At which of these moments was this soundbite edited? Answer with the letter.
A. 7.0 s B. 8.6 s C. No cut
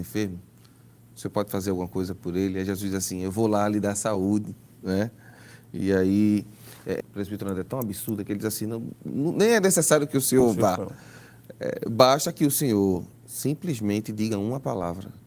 A